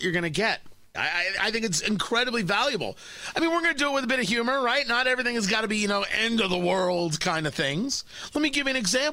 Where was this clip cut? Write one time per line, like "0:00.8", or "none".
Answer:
0:00.9